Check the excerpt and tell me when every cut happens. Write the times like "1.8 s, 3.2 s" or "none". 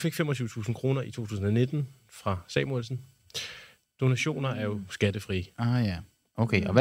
3.8 s

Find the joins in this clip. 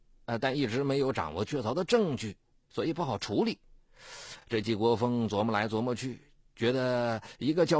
none

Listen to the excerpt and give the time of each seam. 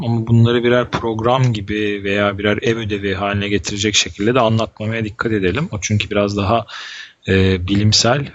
none

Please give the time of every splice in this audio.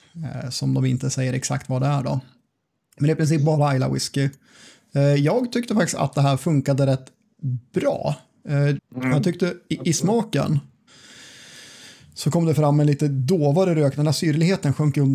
8.8 s

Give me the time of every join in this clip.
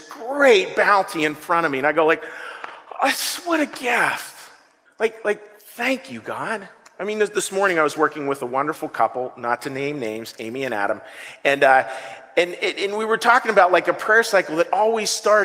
4.9 s

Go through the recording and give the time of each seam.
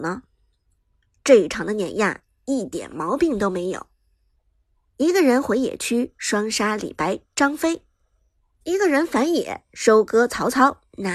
none

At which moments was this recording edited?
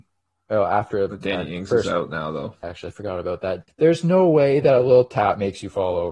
2.6 s, 3.7 s

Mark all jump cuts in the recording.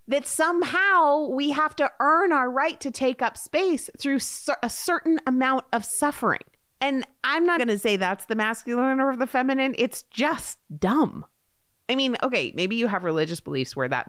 7.6 s

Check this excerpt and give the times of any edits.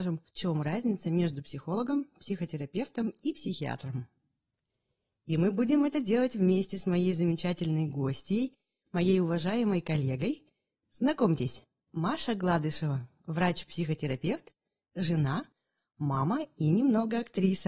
none

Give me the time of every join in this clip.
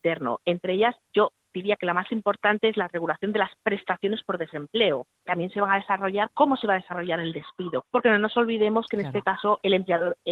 5.2 s, 7.8 s

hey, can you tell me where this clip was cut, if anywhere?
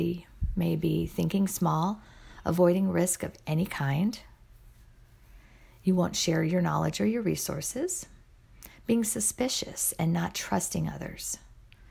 none

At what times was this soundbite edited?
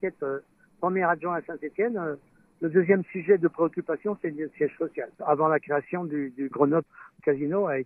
5.1 s, 6.5 s

